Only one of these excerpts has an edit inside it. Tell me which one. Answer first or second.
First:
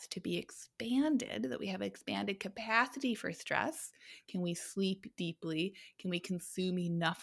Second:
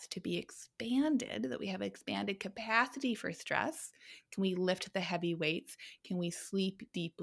first